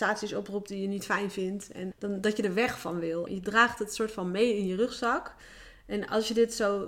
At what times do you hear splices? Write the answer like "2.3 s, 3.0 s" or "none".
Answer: 1.9 s, 3.3 s